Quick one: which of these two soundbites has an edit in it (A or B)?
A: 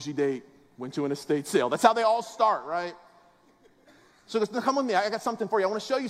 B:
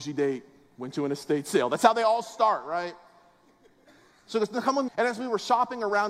B